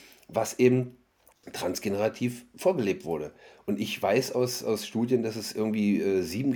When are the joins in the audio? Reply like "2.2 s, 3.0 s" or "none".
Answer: none